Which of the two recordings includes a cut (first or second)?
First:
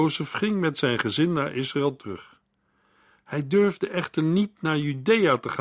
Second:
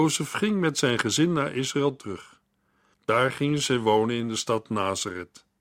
second